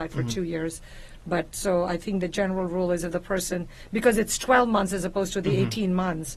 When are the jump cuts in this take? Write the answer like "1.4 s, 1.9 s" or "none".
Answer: none